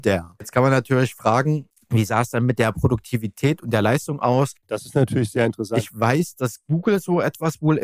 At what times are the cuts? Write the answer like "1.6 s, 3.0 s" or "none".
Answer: 4.6 s